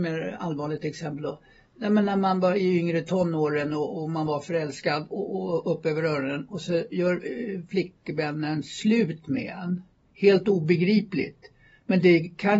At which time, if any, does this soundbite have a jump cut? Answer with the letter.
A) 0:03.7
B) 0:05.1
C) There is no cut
B